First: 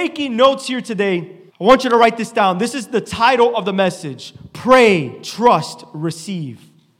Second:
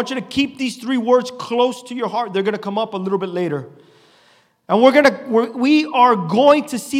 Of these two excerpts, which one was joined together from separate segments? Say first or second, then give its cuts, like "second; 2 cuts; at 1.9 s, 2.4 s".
first; 1 cut; at 1.5 s